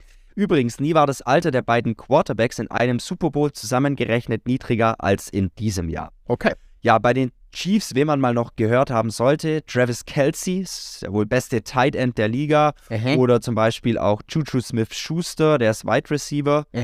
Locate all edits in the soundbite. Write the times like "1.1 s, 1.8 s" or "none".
none